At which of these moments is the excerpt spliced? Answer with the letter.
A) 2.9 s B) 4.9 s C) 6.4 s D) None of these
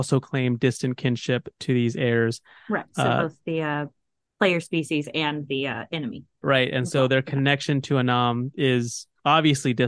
C